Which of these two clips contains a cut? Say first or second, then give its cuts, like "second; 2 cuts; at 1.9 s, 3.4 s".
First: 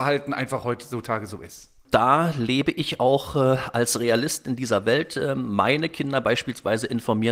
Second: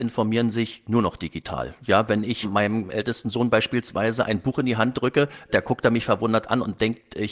second; 2 cuts; at 2.4 s, 5.5 s